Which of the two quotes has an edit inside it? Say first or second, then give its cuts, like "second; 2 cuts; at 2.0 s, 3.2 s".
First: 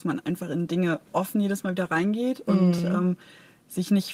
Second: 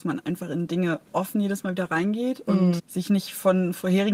second; 1 cut; at 2.8 s